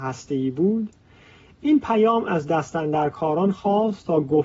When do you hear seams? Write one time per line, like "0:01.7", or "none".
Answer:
none